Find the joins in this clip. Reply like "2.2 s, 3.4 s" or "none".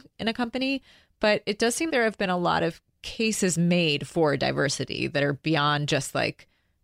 1.9 s